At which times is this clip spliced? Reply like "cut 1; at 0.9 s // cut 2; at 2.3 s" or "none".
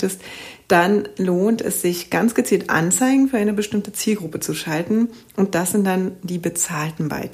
none

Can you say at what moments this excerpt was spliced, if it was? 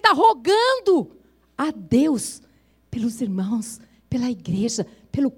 none

